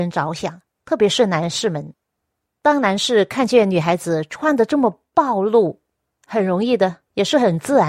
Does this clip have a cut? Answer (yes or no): no